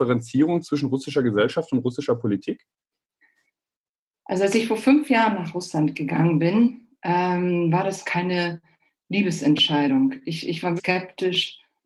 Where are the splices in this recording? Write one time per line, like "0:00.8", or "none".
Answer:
0:10.8